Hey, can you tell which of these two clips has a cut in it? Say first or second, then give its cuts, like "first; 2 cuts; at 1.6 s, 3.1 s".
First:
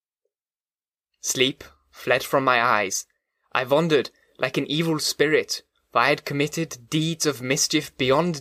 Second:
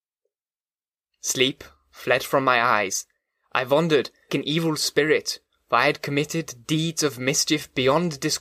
second; 1 cut; at 4.3 s